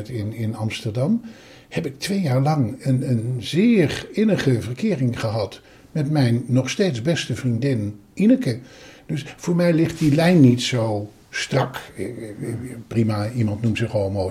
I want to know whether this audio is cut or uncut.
uncut